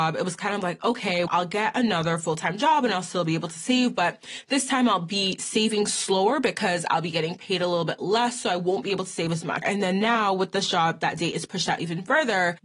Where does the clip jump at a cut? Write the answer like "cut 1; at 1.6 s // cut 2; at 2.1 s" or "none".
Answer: cut 1; at 1.3 s // cut 2; at 9.6 s